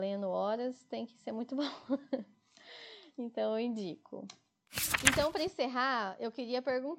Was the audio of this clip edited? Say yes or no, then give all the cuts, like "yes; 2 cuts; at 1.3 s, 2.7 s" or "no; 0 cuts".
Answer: no; 0 cuts